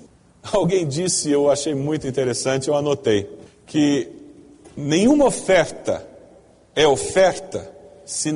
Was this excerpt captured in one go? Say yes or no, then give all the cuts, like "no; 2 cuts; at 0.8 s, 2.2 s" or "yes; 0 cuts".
yes; 0 cuts